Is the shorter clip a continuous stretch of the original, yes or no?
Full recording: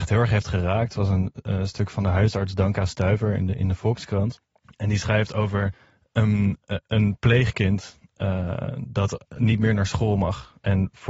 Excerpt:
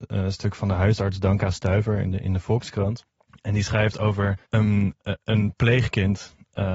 no